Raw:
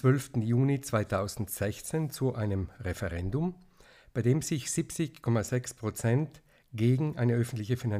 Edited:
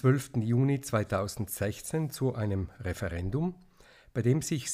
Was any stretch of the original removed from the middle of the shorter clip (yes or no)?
no